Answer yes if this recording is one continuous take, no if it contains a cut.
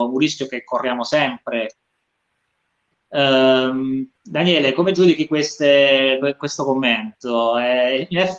no